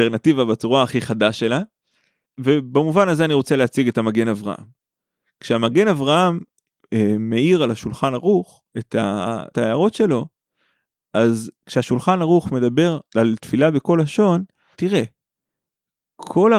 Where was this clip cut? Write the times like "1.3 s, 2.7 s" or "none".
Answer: 8.7 s, 13.1 s, 14.7 s